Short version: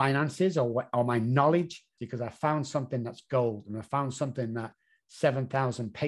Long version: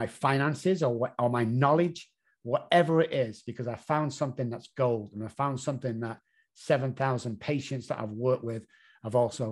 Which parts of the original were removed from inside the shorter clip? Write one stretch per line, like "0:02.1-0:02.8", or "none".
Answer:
0:02.2-0:03.4